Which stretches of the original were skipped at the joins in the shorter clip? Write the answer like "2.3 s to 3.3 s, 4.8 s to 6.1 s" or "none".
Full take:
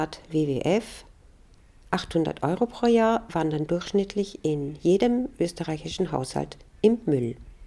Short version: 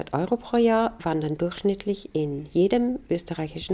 none

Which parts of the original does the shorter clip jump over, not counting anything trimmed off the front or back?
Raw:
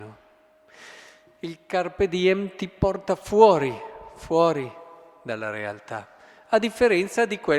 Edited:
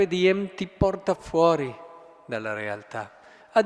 3.2 s to 4.1 s

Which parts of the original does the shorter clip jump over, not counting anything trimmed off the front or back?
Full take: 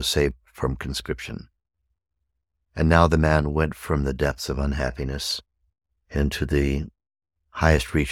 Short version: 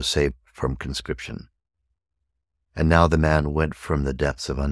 none

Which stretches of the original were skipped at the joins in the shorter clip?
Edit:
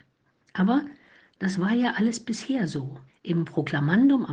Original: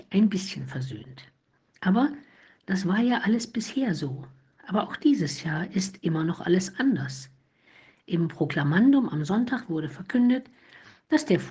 4.3 s to 7.9 s

